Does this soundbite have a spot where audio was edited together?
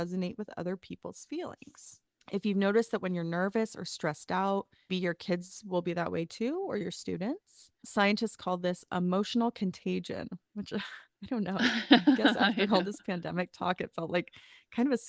yes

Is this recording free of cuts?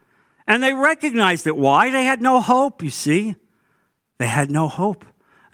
yes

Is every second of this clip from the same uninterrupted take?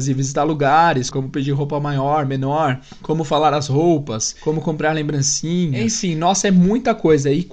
no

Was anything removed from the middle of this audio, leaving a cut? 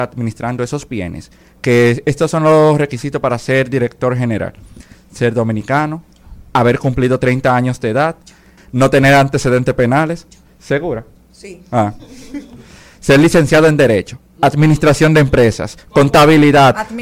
yes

